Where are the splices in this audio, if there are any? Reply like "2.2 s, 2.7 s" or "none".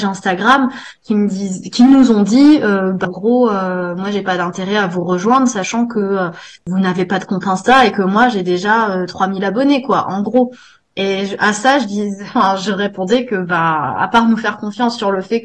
3.0 s